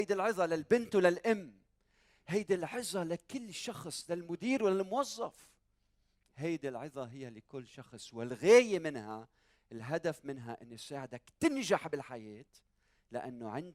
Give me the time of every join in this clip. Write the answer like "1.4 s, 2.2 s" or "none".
none